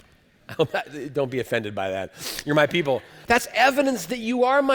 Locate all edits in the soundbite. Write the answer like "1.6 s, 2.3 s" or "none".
3.2 s